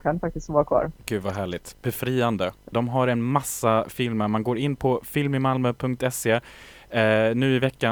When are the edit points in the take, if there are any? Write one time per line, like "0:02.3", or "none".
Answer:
0:01.0
0:02.7